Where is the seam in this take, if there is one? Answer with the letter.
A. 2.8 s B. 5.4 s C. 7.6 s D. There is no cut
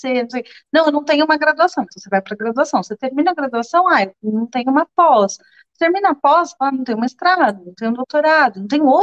D